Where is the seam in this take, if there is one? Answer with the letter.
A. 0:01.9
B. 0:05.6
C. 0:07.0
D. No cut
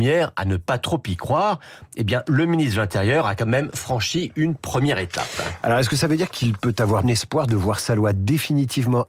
C